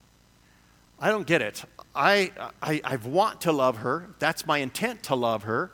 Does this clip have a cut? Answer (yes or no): no